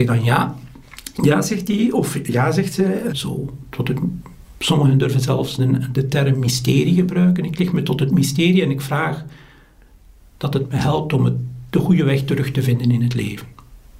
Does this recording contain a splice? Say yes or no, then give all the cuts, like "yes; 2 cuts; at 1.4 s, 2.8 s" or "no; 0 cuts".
yes; 1 cut; at 3.1 s